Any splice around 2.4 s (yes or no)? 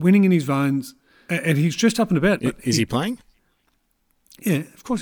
yes